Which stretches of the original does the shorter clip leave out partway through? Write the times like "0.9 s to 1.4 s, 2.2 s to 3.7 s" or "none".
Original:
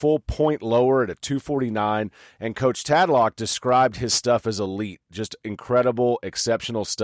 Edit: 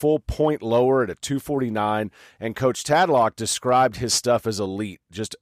none